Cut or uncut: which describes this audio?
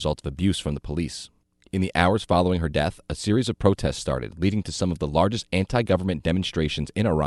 uncut